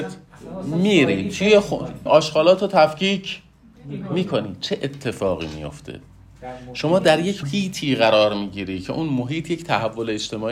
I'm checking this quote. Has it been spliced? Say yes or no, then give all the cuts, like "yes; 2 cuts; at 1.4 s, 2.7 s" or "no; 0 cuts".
yes; 2 cuts; at 2.1 s, 7.4 s